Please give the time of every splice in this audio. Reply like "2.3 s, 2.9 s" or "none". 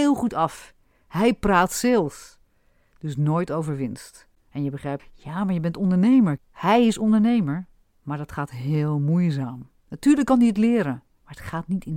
5.0 s, 6.4 s, 9.8 s